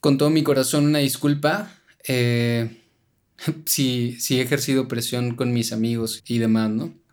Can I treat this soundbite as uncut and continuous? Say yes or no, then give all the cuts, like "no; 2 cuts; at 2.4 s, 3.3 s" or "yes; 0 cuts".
no; 1 cut; at 6.2 s